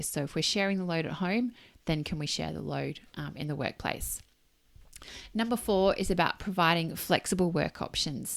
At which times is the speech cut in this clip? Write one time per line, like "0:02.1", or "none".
none